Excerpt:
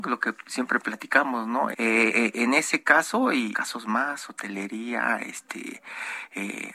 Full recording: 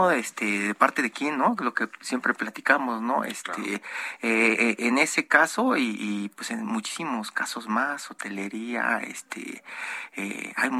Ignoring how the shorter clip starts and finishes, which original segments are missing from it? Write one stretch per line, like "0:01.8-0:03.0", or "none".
0:03.3-0:04.2
0:06.0-0:07.3